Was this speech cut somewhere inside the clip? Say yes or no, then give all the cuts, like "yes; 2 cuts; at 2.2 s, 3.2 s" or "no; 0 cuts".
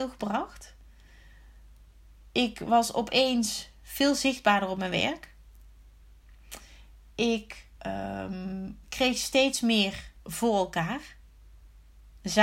yes; 3 cuts; at 7.8 s, 8.8 s, 10.2 s